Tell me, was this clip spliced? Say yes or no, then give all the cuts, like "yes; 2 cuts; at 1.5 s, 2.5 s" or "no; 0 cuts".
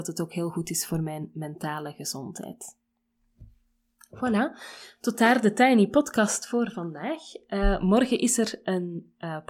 no; 0 cuts